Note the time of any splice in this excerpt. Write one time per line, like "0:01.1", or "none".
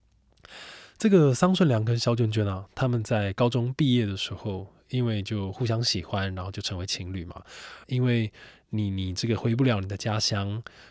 0:07.8

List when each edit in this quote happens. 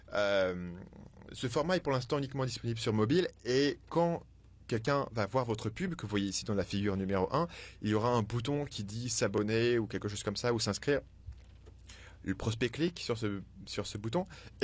none

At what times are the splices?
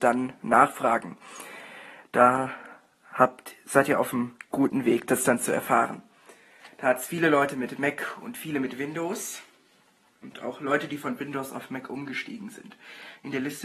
none

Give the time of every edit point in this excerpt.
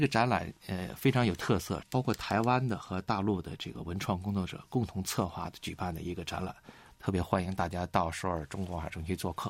0:01.8

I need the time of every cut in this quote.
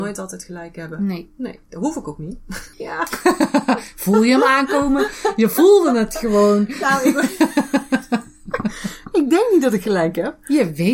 0:02.7

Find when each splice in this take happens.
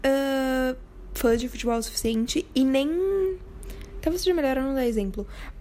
0:04.0

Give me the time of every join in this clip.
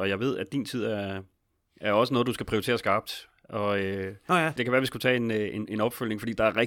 0:04.6

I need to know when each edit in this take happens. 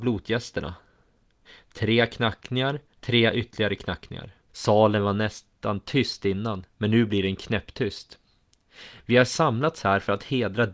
0:03.0
0:04.5

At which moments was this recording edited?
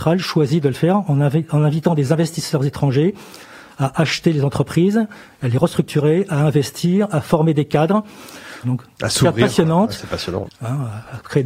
0:08.6
0:10.4

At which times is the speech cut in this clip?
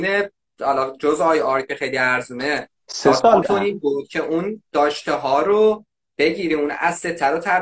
0:03.4

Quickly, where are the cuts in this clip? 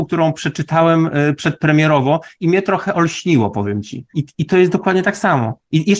0:04.1

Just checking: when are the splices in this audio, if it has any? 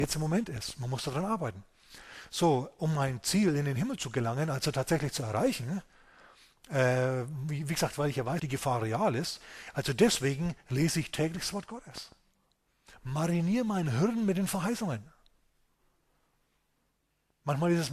0:08.4

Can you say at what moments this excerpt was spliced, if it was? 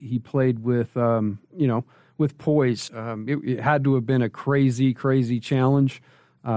0:02.9

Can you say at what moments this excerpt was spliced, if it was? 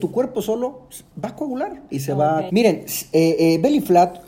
0:02.5

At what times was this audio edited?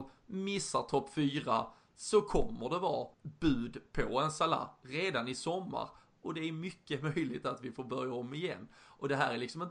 0:03.1

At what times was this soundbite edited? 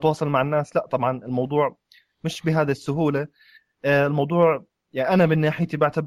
none

